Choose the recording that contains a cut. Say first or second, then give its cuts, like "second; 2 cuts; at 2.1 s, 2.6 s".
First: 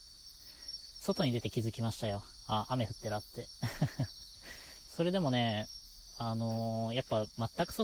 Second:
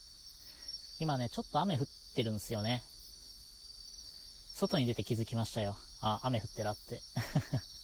first; 1 cut; at 0.9 s